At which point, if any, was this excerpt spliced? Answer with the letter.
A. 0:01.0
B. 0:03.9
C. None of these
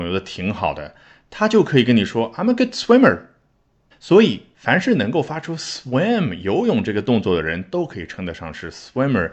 B